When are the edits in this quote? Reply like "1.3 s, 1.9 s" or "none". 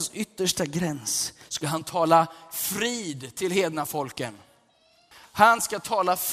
5.1 s